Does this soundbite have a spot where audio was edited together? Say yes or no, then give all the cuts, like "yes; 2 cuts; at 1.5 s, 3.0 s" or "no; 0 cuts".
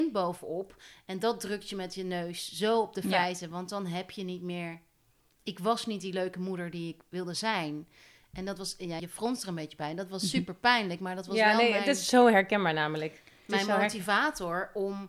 yes; 1 cut; at 9.0 s